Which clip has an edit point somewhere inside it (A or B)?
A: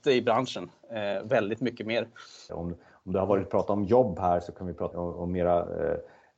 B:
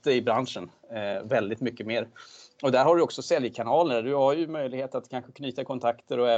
A